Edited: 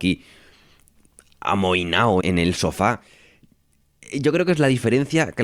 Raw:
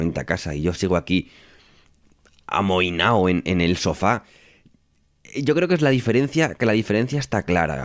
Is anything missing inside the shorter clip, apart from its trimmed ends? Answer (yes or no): yes